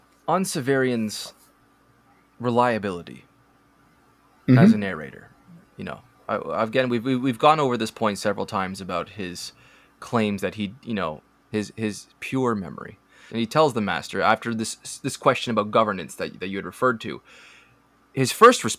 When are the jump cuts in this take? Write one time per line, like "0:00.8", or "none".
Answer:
0:11.4
0:13.3